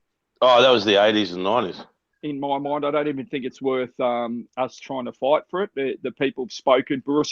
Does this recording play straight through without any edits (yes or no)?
no